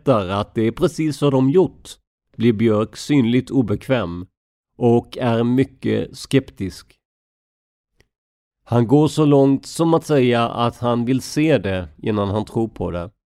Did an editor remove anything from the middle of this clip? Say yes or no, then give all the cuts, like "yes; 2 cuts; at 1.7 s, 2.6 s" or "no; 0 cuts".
no; 0 cuts